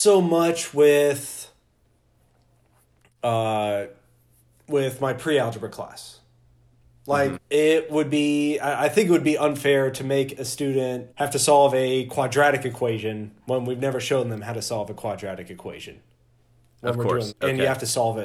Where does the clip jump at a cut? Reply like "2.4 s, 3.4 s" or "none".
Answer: 7.3 s, 11.1 s, 17.3 s